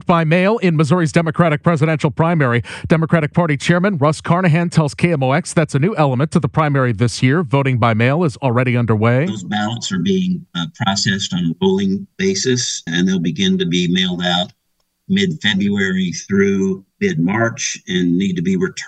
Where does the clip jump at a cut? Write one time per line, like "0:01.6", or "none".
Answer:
0:12.9
0:16.9